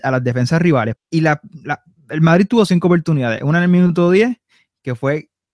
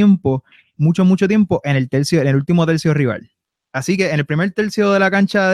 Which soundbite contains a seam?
first; 1 cut; at 1.0 s

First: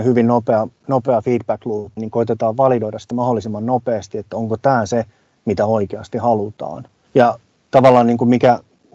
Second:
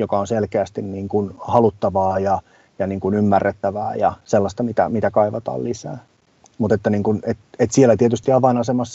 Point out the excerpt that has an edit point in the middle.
first; 2 cuts; at 2.0 s, 7.1 s

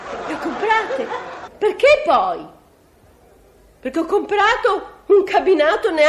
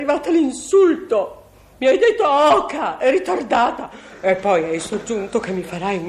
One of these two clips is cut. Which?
first; 1 cut; at 1.5 s

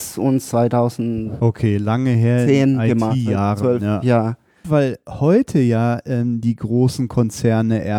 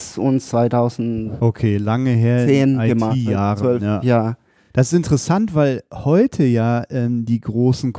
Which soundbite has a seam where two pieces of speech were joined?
first; 1 cut; at 4.6 s

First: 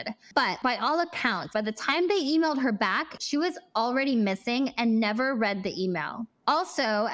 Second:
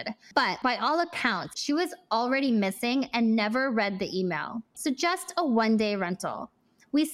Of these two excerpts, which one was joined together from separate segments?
second; 2 cuts; at 1.5 s, 4.7 s

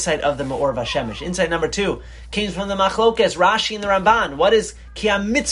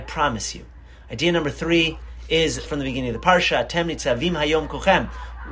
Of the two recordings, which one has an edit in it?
second; 1 cut; at 2.7 s

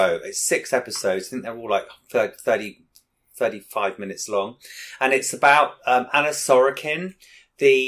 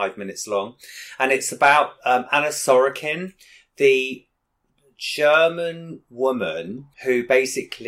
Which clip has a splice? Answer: second; 1 cut; at 6.9 s

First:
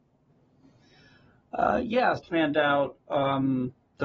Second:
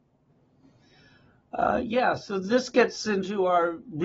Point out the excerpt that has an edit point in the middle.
first; 1 cut; at 2.2 s

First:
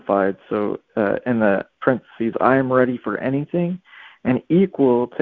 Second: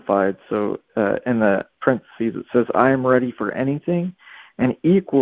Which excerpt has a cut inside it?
first; 1 cut; at 2.3 s

